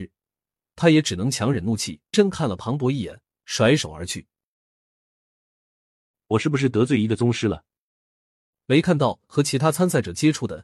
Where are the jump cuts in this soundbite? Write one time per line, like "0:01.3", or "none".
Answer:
0:02.1
0:08.5

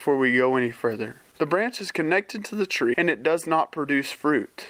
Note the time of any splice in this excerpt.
0:01.3
0:02.9

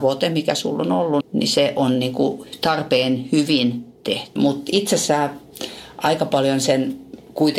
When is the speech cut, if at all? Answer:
0:01.2
0:04.4

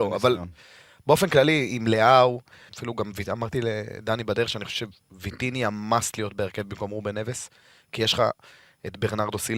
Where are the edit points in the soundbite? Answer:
0:02.7

